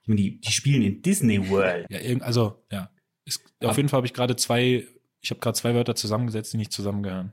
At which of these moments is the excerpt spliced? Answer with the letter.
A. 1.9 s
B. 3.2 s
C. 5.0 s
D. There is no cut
A